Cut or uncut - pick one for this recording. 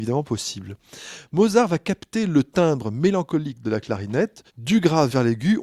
cut